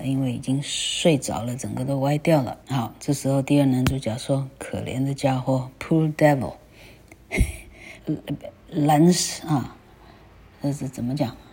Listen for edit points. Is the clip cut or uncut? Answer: cut